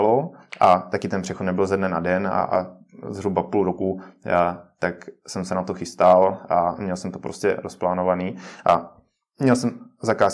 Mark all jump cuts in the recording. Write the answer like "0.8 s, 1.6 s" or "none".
none